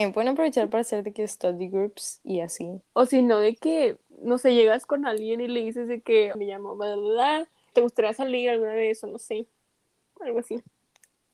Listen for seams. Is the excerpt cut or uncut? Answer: cut